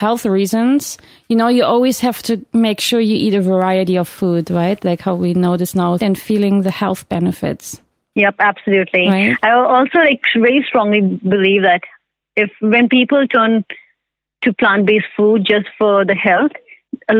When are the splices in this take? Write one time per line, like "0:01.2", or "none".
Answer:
0:06.0